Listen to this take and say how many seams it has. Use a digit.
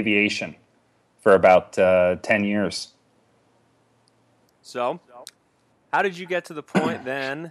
1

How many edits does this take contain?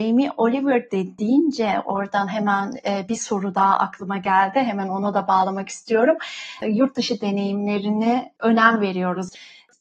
0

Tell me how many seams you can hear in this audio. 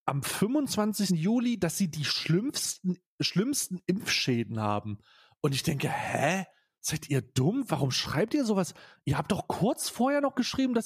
1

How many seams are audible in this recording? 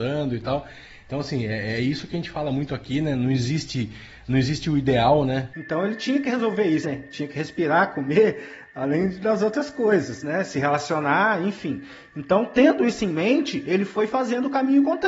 2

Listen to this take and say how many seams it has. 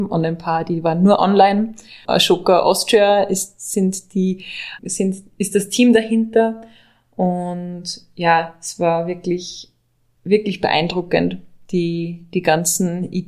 2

